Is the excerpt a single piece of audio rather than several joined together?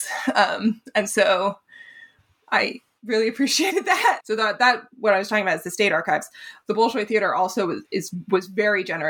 no; 1 cut; at 4.2 s

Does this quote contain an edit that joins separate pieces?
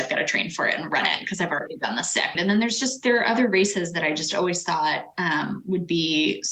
yes; 1 cut; at 2.4 s

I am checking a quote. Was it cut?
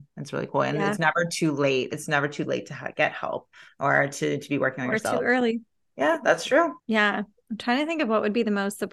yes; 1 cut; at 6.8 s

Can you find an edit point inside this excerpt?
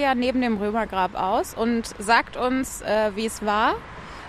no; 0 cuts

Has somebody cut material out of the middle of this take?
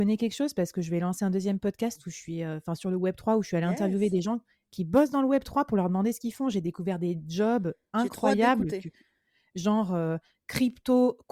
no; 0 cuts

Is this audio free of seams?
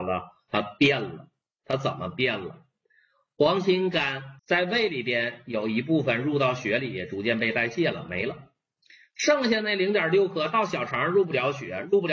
no; 1 cut; at 4.4 s

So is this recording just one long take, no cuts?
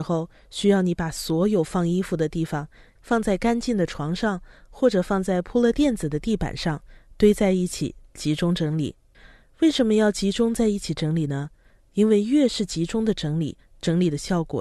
no; 1 cut; at 3.0 s

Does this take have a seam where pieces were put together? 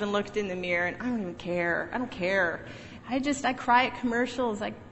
yes; 1 cut; at 3.0 s

